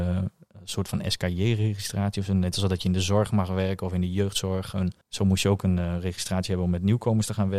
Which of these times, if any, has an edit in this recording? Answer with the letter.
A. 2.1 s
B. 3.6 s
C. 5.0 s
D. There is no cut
C